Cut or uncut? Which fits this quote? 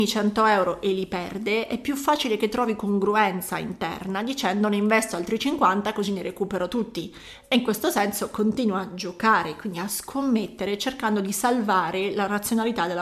uncut